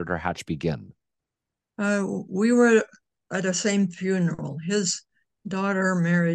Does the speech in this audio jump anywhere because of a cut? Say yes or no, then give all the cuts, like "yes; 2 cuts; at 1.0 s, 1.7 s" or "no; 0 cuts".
no; 0 cuts